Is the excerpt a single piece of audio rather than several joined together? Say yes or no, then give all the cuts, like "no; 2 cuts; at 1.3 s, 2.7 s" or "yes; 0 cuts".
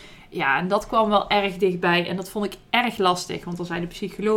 yes; 0 cuts